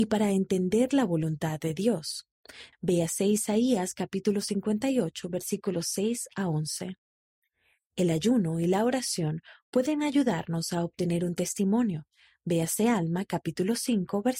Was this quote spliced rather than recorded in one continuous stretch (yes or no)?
yes